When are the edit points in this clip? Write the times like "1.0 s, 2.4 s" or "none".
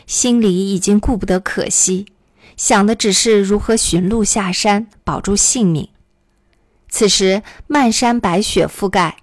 none